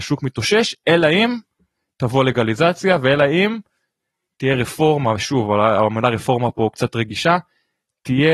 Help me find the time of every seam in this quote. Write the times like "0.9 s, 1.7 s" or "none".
none